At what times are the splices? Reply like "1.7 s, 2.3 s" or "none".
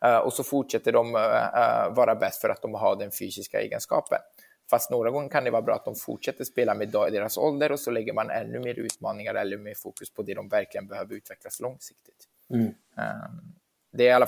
none